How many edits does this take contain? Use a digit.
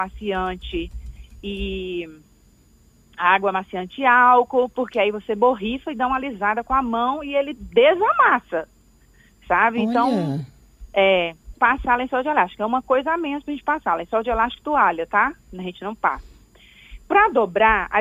1